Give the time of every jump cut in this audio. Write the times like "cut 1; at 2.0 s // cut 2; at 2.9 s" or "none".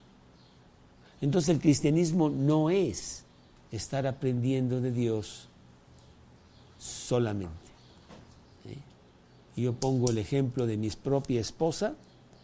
cut 1; at 8.5 s